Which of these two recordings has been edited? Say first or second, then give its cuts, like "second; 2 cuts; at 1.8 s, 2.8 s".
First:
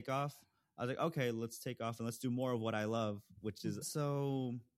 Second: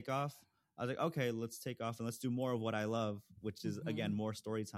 first; 1 cut; at 3.8 s